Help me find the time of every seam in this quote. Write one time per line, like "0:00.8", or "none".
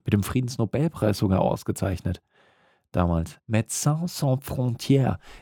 0:03.4